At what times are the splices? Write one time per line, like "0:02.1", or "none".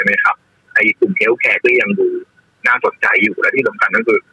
none